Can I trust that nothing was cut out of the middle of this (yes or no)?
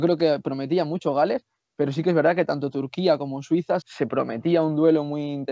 no